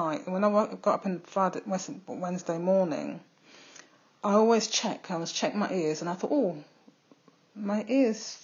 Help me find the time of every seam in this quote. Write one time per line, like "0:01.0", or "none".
none